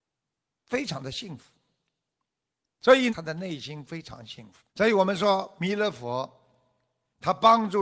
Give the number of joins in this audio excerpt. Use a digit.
2